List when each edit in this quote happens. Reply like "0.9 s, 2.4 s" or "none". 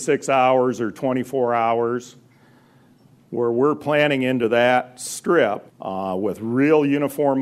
5.7 s